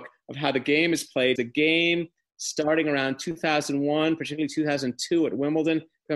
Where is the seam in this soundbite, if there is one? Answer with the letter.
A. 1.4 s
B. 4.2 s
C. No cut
A